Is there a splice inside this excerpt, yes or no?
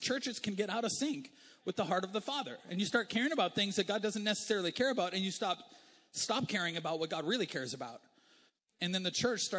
no